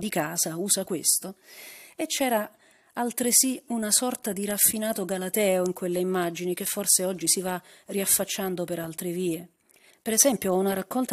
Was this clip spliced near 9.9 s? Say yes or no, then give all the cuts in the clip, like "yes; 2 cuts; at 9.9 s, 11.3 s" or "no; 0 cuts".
yes; 1 cut; at 9.9 s